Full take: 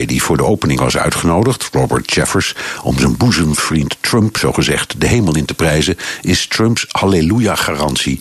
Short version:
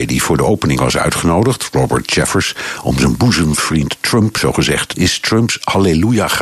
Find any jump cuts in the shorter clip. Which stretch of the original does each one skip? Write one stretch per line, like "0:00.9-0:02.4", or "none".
0:04.9-0:06.2